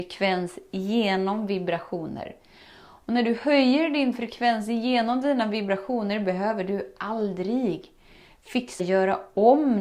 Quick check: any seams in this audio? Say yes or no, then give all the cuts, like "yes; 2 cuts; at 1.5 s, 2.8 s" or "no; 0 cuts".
yes; 1 cut; at 8.8 s